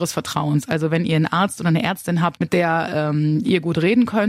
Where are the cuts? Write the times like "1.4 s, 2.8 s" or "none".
2.4 s